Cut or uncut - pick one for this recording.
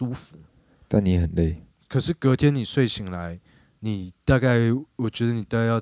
cut